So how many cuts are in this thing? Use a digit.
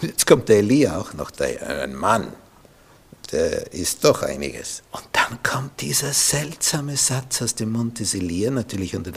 1